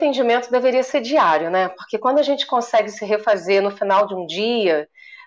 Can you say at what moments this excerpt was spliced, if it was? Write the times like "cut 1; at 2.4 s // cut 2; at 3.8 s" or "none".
none